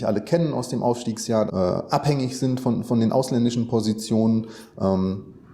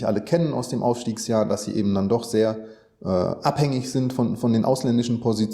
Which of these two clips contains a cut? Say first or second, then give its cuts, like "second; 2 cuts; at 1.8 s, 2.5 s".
first; 1 cut; at 1.5 s